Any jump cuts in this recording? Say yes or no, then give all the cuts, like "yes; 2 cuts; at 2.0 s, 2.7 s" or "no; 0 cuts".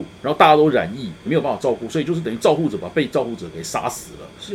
yes; 1 cut; at 1.3 s